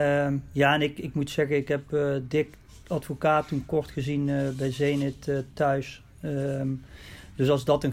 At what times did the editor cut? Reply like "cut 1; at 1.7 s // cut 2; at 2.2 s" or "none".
none